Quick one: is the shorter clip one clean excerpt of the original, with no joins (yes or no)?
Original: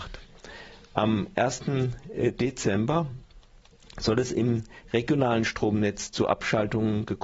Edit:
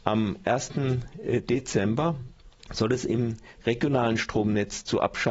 no